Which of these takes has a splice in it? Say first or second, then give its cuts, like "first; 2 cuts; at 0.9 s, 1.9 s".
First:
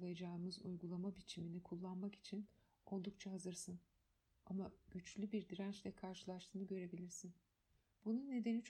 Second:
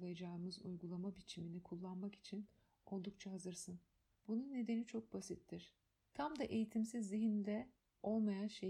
second; 2 cuts; at 4.1 s, 6.0 s